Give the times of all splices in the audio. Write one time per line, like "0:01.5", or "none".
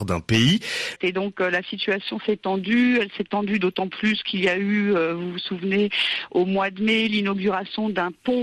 0:01.0

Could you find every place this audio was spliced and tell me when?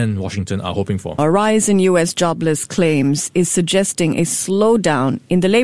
0:01.2

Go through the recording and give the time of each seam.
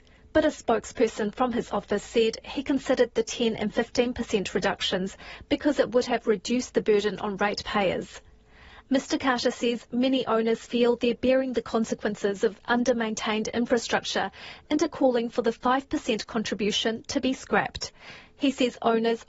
0:08.8

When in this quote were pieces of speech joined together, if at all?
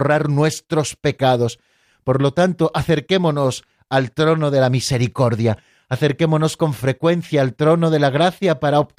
none

